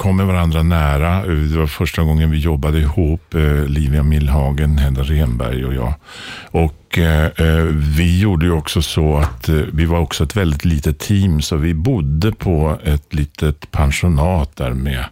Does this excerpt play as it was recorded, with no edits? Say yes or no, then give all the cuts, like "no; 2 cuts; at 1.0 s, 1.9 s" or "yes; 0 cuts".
yes; 0 cuts